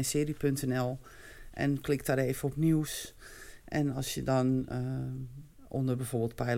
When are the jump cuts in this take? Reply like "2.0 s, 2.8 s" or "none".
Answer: none